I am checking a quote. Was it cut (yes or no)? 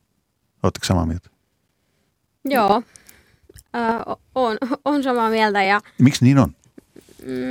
no